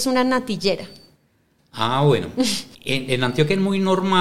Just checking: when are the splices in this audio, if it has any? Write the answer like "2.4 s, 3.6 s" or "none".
2.7 s

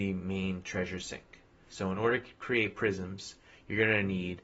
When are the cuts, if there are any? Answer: none

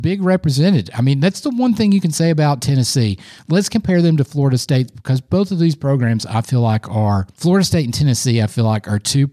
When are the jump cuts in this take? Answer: none

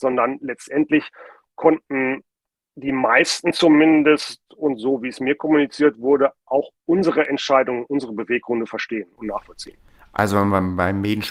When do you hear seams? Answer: none

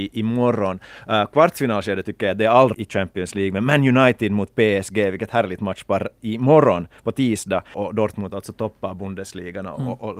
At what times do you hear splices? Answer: 2.7 s, 7.7 s

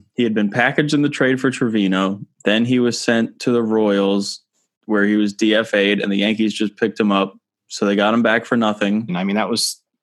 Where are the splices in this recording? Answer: 9.1 s

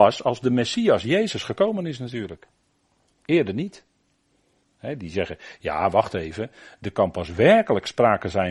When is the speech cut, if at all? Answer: 4.6 s

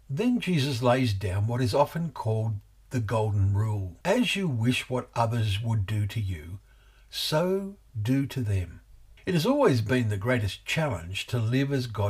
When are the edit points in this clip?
4.0 s, 9.2 s

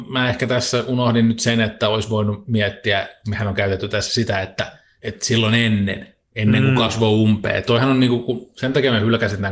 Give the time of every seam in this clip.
none

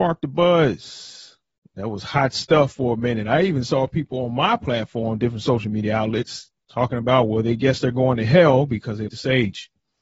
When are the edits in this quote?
9.1 s

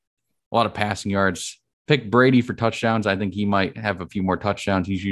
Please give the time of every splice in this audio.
none

